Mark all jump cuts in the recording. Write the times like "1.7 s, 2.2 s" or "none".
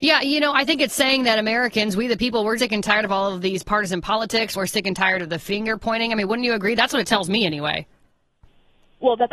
2.6 s, 4.5 s